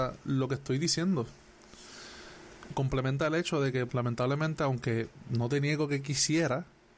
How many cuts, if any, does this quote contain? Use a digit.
1